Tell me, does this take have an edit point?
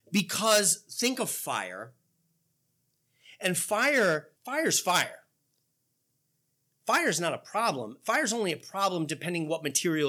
yes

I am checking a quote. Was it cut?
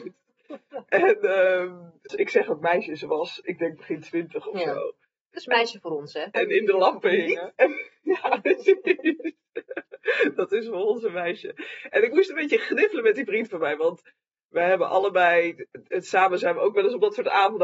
yes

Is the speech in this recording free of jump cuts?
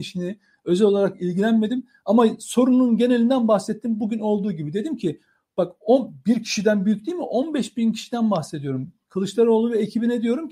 yes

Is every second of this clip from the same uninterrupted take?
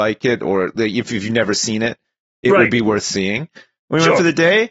yes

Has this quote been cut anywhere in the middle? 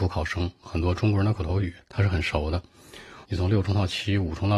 yes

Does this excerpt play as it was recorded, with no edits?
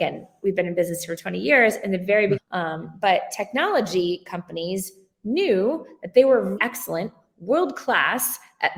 no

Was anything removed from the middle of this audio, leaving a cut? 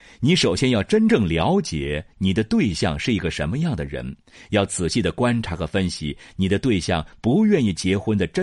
no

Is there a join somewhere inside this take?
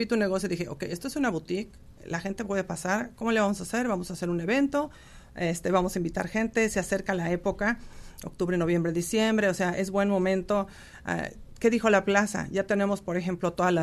no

